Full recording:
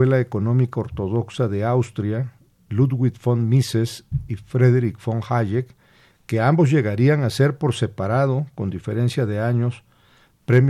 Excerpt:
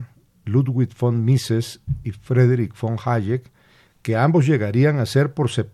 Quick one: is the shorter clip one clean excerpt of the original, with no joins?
yes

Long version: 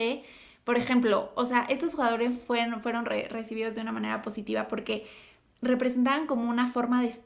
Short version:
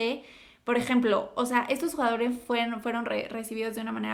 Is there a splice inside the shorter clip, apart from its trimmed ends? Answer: no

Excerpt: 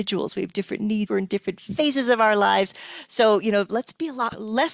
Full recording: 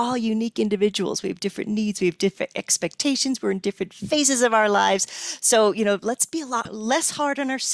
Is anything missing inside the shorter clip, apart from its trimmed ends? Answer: yes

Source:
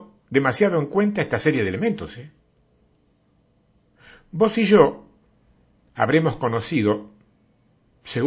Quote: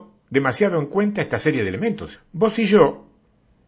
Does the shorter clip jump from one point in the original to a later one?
yes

